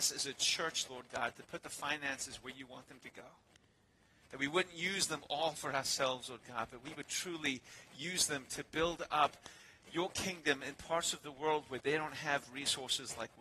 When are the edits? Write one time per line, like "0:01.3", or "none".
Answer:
0:05.6